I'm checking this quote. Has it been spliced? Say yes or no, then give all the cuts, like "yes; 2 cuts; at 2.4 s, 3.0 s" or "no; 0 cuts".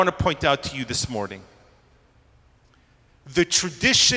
no; 0 cuts